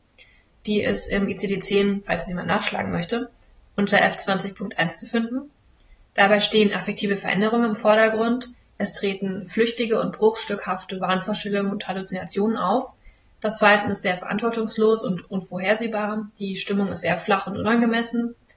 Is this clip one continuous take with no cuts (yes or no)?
yes